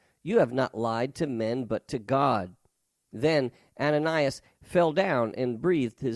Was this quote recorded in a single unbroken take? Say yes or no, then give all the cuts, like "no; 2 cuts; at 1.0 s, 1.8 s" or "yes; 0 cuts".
no; 1 cut; at 4.5 s